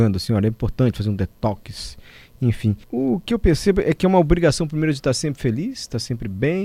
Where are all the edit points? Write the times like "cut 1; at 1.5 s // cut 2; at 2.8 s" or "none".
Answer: cut 1; at 2.8 s